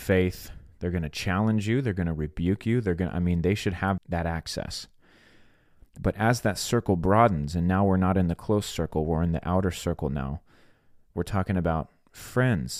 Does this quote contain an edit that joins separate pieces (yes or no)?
yes